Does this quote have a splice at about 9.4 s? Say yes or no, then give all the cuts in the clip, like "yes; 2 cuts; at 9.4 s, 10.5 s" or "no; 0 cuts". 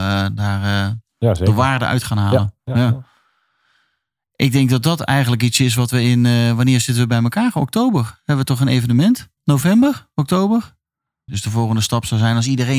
yes; 2 cuts; at 9.4 s, 11.3 s